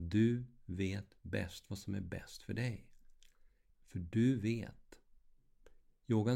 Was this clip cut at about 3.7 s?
yes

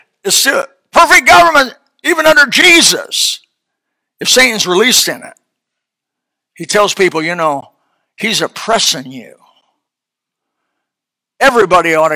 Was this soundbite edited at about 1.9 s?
no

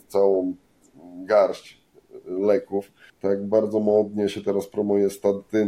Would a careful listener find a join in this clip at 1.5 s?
no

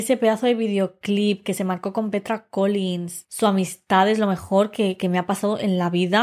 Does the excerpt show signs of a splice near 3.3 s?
no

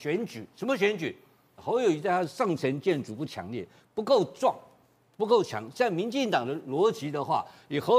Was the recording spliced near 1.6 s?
yes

